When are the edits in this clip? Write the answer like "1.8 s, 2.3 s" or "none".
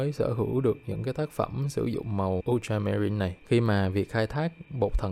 3.4 s